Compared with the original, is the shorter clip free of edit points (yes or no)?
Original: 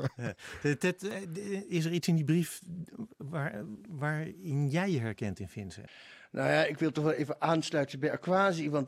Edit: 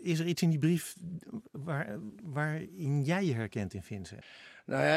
yes